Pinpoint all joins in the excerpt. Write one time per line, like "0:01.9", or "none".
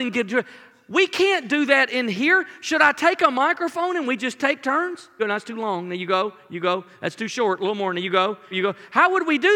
0:05.2
0:08.5